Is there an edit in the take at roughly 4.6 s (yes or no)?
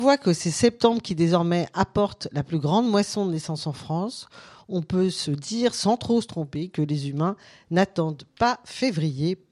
no